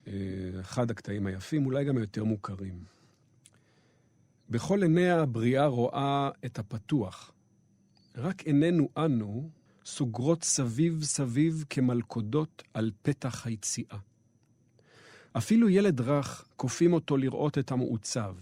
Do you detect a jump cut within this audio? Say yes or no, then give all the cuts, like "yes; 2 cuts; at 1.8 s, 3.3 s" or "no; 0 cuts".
yes; 3 cuts; at 9.7 s, 15.3 s, 16.5 s